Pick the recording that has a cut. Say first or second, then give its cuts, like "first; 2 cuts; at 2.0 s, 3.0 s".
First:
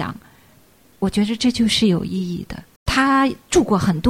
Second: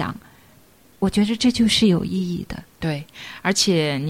first; 1 cut; at 2.8 s